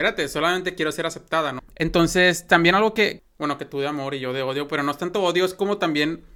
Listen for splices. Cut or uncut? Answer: cut